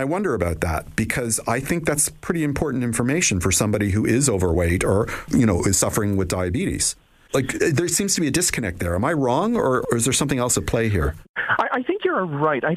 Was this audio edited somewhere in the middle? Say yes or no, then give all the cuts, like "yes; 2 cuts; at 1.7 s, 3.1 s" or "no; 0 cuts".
no; 0 cuts